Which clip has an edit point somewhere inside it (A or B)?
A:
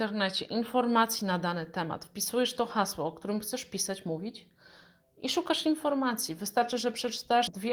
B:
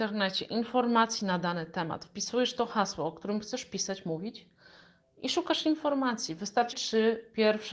B